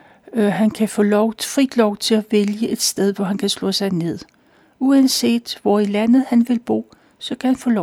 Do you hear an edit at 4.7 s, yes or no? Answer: no